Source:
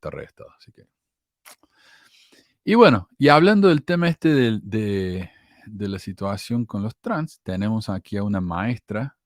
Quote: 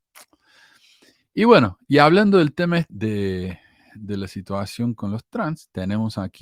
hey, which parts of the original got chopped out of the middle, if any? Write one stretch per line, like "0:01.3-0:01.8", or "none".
0:04.2-0:04.6

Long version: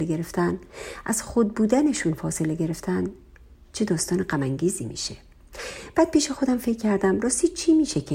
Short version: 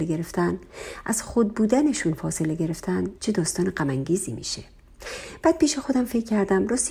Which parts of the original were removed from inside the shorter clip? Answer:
0:03.2-0:03.7

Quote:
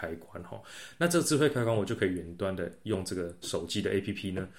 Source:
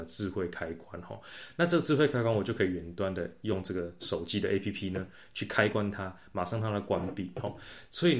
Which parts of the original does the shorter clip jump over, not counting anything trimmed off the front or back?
none

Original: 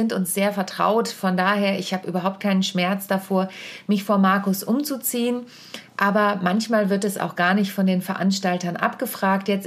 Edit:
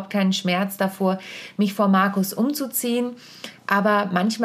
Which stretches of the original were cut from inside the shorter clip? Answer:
none

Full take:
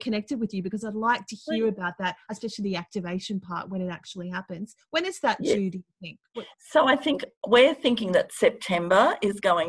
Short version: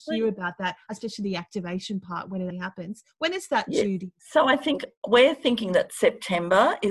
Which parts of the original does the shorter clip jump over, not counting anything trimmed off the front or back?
0:03.9-0:04.2
0:05.9-0:06.6

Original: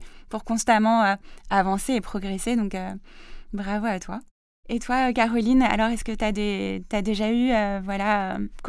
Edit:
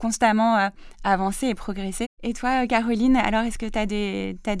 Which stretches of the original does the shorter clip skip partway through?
0:02.5-0:04.5

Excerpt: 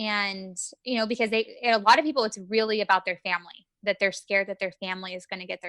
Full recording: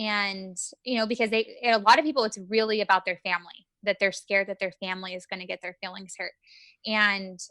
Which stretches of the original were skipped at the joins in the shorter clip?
none

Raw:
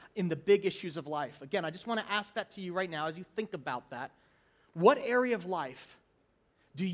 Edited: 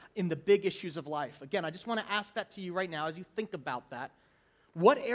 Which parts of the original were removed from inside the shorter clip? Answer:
none

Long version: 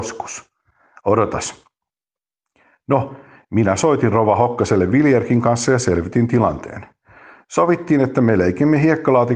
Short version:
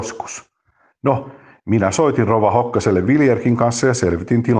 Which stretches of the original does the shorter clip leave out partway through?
0:00.9-0:02.8

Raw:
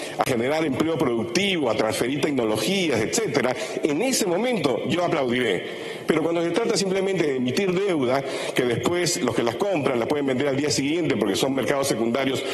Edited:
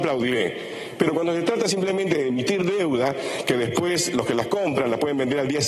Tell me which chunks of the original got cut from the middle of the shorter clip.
none

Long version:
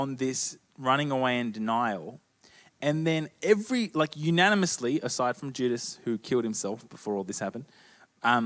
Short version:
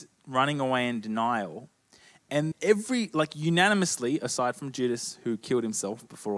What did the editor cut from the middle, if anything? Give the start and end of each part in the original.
0:03.0-0:03.3

